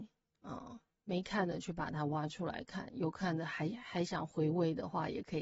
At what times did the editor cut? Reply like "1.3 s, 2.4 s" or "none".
none